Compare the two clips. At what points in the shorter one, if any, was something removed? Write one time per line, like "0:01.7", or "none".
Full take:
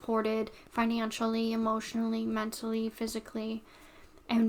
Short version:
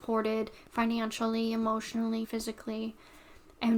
0:02.2